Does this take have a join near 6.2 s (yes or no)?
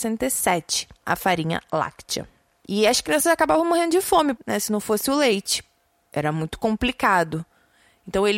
no